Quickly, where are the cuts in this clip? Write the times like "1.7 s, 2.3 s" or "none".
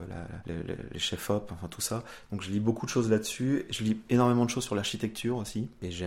none